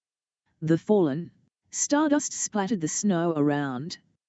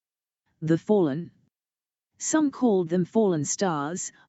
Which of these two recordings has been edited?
first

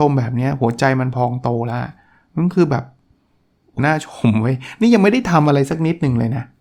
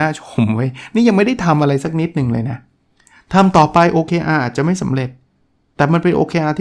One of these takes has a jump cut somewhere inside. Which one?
first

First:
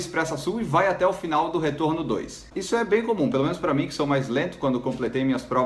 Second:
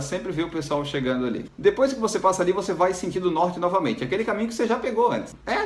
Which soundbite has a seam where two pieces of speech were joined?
first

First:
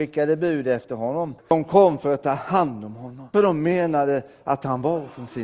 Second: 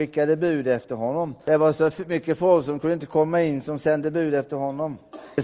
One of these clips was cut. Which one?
first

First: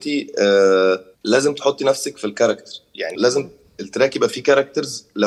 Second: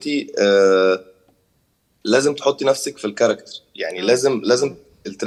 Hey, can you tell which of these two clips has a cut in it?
first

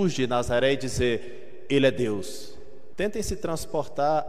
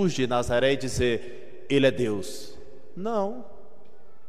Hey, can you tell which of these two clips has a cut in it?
first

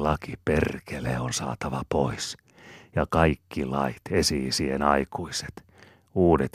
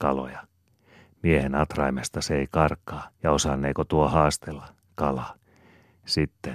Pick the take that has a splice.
second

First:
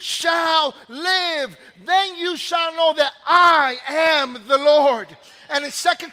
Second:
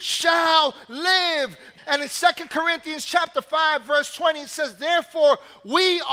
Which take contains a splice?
second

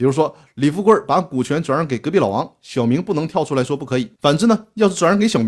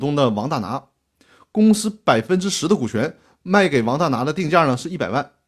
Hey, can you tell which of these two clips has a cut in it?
first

